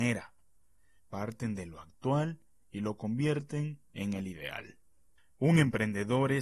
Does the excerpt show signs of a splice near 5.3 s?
no; 2 cuts; at 1.0 s, 3.9 s

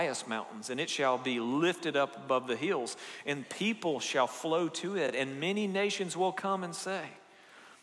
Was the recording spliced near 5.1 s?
no; 0 cuts

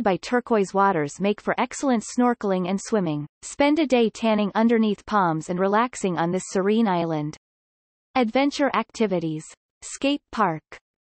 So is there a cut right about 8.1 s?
no; 1 cut; at 3.3 s

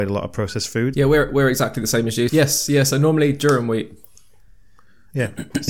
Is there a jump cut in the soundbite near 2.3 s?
yes; 2 cuts; at 0.9 s, 2.3 s

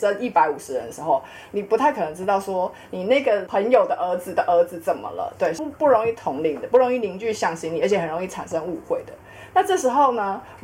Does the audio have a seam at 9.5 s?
no; 1 cut; at 5.6 s

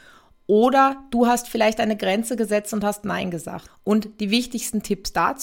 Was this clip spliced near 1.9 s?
no; 1 cut; at 3.7 s

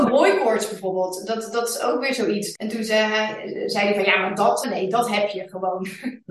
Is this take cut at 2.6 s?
yes; 2 cuts; at 2.6 s, 4.6 s

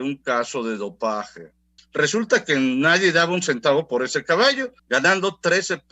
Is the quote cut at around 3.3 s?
no; 2 cuts; at 1.8 s, 4.8 s

